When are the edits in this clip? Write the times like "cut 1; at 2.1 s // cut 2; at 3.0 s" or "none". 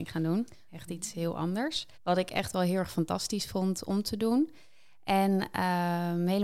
cut 1; at 1.9 s